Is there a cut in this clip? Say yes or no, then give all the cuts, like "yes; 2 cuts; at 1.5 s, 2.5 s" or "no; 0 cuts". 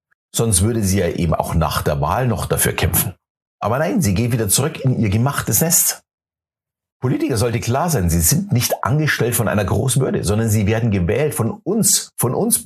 no; 0 cuts